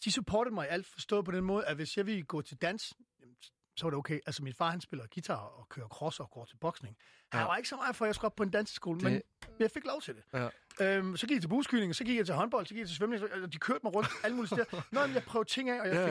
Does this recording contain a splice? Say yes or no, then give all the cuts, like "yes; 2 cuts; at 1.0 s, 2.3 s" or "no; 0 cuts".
no; 0 cuts